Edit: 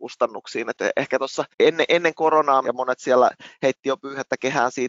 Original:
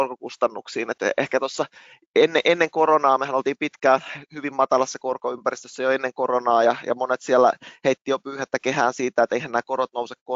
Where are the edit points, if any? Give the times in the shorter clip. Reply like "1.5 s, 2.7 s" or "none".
1.5 s, 2.6 s